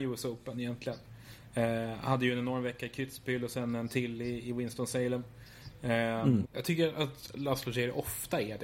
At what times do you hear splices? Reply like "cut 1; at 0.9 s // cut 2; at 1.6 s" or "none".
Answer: cut 1; at 6.4 s